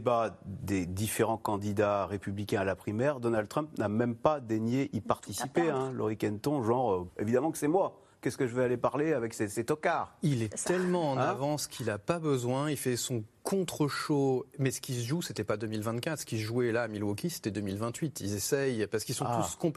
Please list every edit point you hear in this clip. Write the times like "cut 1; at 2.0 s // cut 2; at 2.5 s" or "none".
cut 1; at 7.1 s